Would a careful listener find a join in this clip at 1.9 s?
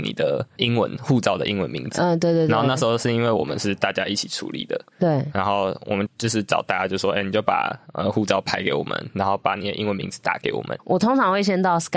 no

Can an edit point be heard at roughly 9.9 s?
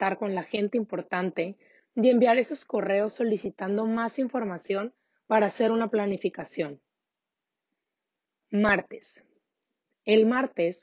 no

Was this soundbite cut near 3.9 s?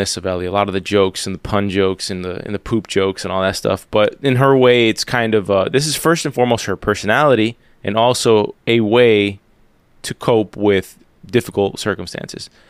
no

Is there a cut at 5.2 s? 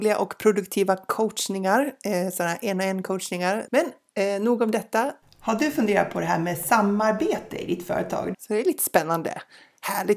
yes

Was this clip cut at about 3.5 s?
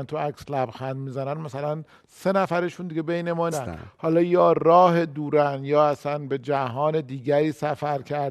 yes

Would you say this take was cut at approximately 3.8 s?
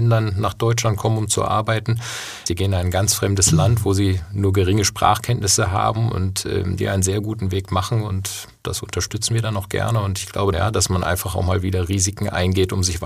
no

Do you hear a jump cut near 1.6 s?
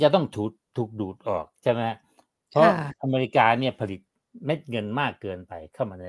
yes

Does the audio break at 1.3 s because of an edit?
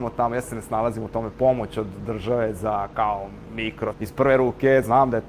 no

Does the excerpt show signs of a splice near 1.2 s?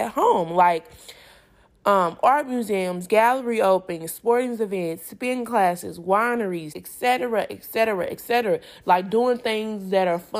no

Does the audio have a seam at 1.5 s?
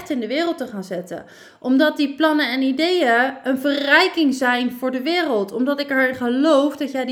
no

